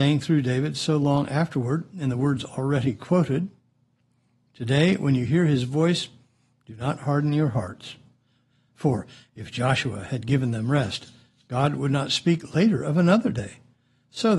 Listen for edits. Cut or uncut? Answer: uncut